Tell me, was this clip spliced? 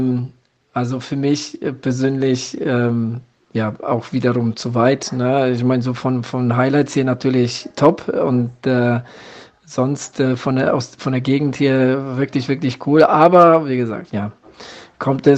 yes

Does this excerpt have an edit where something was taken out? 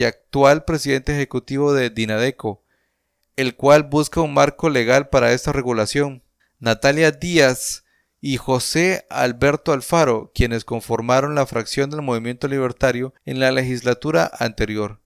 yes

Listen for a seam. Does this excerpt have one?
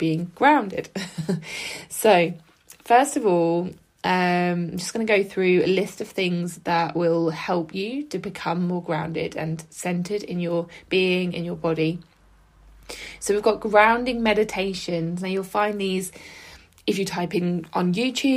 no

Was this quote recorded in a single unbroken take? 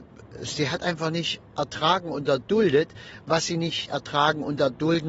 yes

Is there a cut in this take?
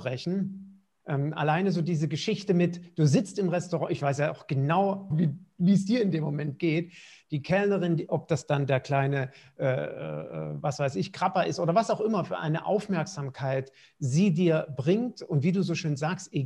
yes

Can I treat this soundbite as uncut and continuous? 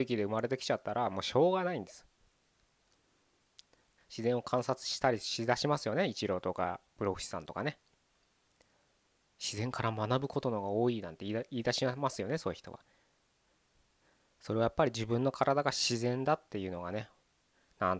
no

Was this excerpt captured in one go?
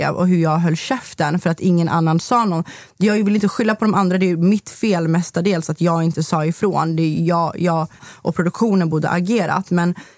no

